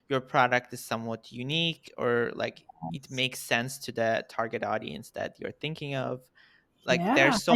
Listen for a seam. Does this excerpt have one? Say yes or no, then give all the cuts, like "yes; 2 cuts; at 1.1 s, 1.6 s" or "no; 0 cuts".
no; 0 cuts